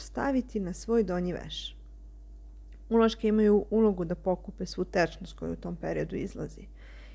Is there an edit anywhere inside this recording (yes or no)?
no